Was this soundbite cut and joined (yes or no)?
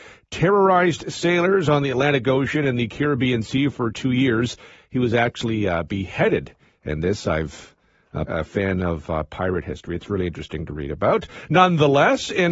yes